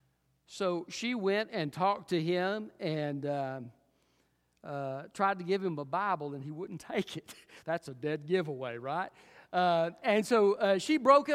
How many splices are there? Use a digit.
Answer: 0